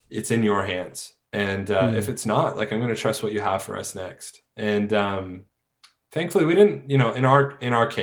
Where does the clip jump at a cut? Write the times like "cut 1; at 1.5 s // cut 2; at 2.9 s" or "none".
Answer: cut 1; at 1.2 s